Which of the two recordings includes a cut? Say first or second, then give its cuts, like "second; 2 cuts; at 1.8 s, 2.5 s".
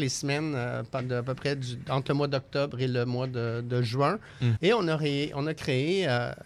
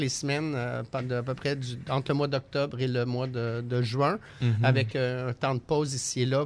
first; 1 cut; at 4.6 s